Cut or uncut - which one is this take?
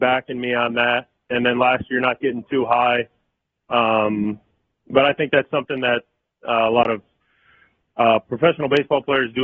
uncut